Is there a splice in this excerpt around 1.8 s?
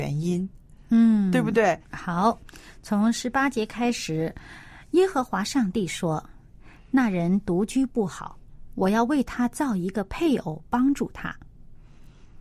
yes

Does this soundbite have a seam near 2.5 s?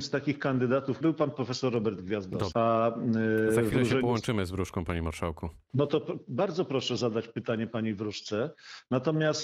yes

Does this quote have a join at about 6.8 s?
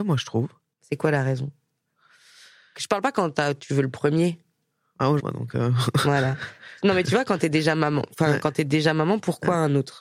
no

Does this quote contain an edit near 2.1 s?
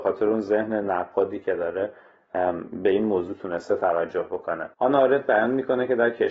no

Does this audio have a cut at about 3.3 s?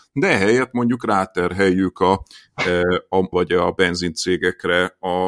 yes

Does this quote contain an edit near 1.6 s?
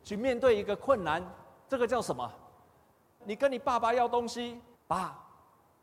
no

